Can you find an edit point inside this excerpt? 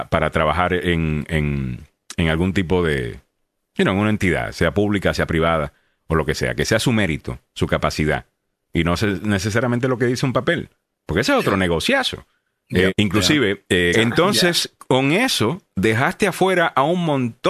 yes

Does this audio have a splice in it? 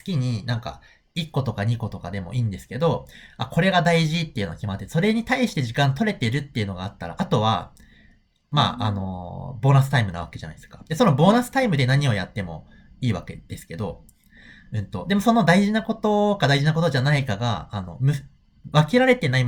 no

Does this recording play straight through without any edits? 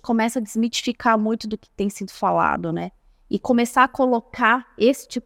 yes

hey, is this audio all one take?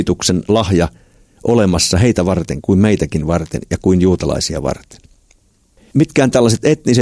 yes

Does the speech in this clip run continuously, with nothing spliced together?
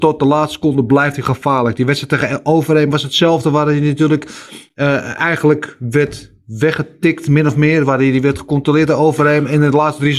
yes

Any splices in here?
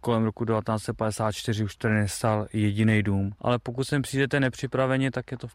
yes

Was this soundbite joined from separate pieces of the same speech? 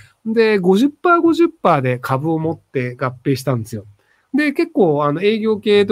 no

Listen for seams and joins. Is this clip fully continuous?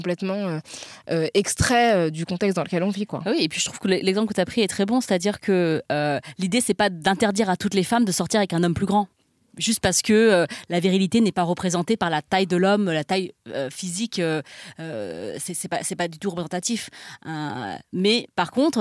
yes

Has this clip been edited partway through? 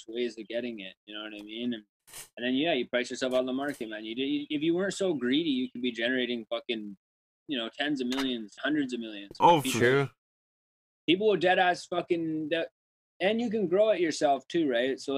yes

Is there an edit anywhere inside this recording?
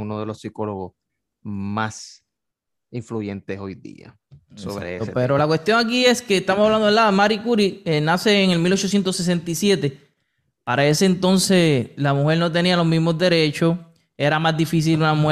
no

